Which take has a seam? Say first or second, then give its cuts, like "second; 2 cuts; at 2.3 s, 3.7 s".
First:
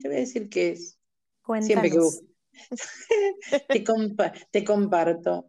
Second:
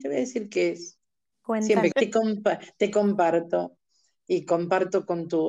second; 1 cut; at 1.9 s